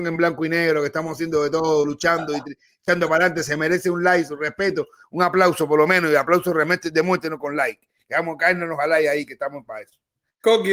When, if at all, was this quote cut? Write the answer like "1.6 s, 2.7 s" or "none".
none